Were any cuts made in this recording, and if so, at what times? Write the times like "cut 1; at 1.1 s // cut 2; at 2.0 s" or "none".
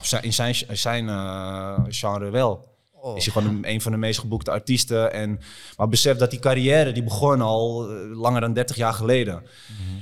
none